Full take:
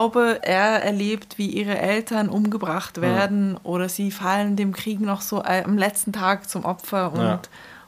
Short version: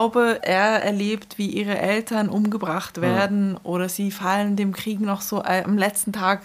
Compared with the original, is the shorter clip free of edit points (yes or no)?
yes